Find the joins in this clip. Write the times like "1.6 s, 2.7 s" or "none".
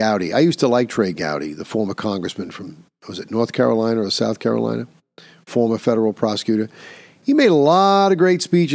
none